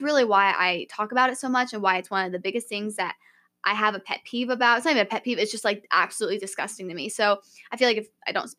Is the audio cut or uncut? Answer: uncut